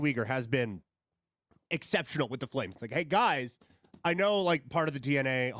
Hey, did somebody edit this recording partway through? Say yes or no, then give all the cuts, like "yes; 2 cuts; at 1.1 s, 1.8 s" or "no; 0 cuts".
yes; 1 cut; at 2.7 s